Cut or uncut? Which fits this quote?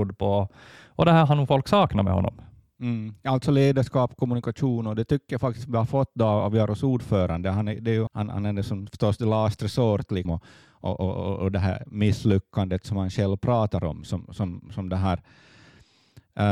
cut